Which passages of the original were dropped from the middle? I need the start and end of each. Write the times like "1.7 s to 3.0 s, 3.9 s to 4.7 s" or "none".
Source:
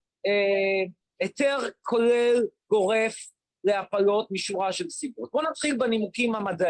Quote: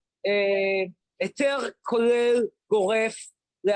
none